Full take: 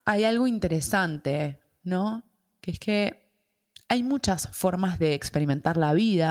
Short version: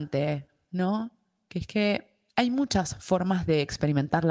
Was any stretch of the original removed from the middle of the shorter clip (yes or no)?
yes